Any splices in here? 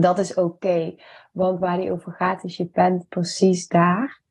no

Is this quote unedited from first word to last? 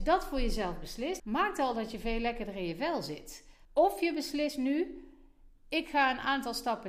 no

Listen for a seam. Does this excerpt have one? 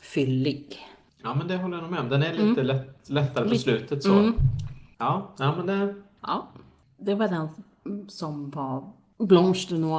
yes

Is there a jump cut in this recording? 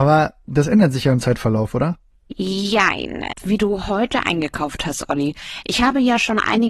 yes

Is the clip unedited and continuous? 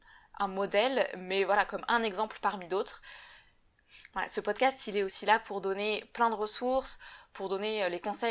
yes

